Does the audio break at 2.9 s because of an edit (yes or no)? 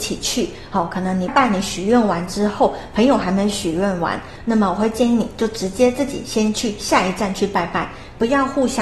no